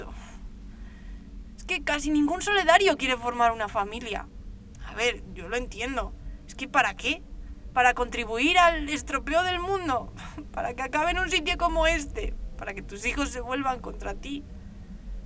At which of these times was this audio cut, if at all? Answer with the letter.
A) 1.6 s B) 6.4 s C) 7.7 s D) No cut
D